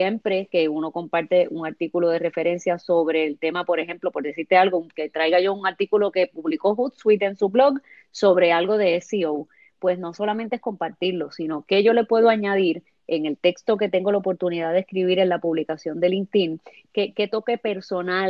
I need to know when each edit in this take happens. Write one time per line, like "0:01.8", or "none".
0:16.9